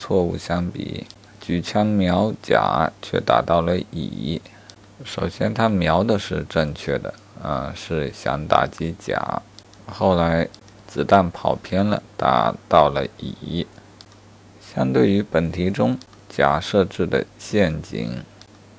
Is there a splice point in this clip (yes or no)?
no